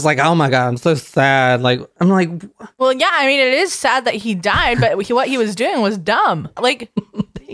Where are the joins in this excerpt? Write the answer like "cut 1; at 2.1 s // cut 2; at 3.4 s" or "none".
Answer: cut 1; at 6.6 s